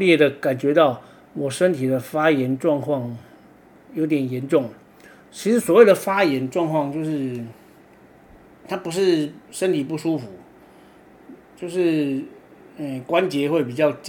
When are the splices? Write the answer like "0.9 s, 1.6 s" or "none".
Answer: none

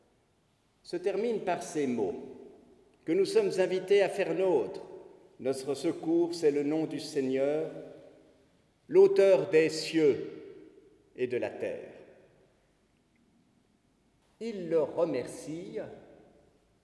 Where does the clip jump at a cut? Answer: 14.2 s

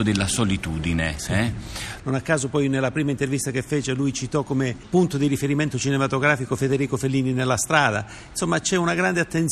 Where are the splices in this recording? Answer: 2.0 s

